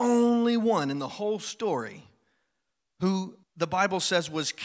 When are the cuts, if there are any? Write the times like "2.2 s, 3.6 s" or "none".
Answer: 3.4 s